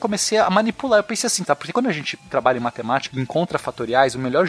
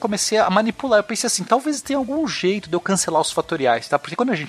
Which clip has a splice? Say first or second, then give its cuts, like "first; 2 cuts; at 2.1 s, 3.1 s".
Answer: first; 2 cuts; at 1.4 s, 3.1 s